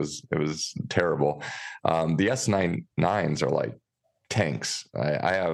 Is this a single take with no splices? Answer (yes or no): yes